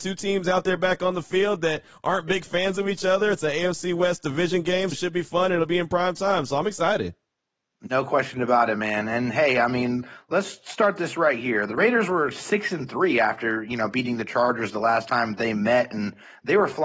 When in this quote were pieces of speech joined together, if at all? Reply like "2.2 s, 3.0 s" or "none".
4.9 s